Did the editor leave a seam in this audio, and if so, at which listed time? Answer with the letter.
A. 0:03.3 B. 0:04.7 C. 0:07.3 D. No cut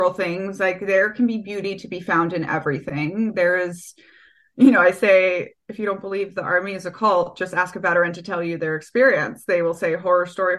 D